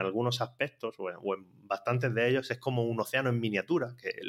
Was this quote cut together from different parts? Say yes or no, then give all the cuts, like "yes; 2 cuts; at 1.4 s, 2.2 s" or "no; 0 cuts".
no; 0 cuts